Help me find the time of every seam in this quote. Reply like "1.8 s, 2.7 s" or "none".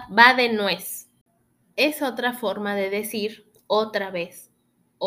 none